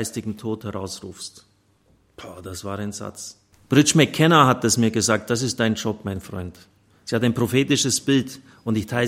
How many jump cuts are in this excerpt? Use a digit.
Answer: 1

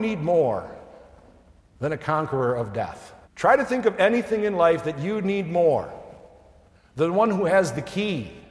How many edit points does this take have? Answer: 1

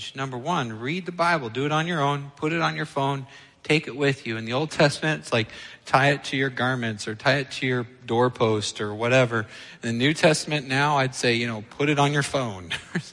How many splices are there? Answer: 0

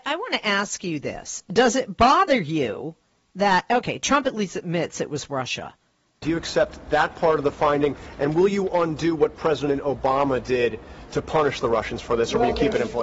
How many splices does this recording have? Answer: 1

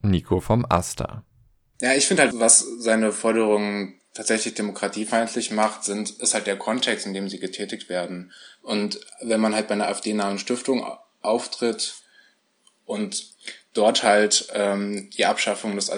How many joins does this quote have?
1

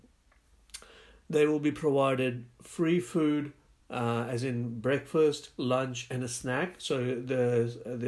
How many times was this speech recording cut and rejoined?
0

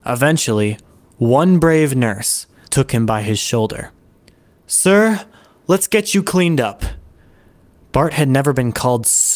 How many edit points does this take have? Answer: 1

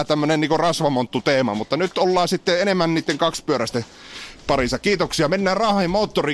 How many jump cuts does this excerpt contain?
0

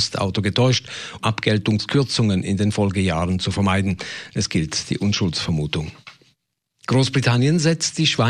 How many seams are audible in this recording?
2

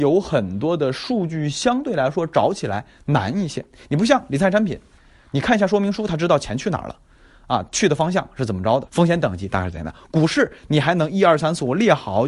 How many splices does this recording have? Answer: 1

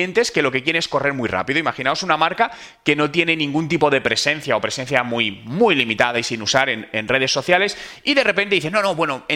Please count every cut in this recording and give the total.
0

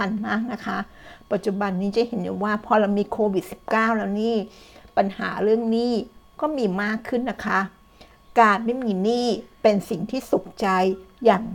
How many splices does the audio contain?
0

